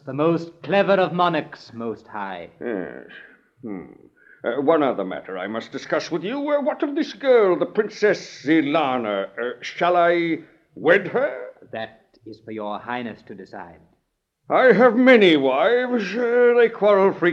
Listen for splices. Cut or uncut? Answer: uncut